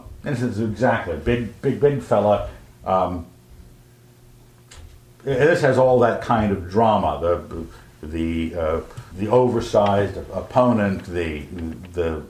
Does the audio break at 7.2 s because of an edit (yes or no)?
no